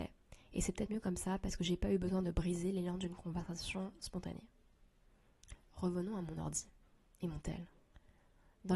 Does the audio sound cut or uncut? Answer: uncut